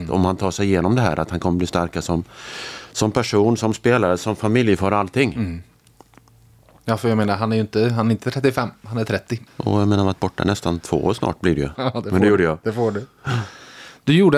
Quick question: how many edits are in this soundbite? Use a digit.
2